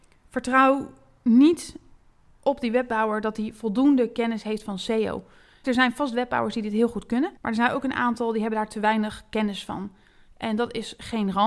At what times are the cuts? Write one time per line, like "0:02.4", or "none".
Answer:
0:05.6
0:07.4